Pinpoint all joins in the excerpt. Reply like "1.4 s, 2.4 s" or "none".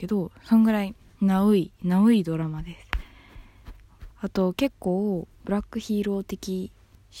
4.1 s, 5.3 s